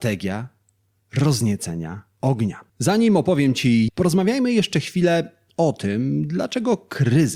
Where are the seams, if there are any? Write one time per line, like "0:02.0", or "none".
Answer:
0:02.7
0:03.9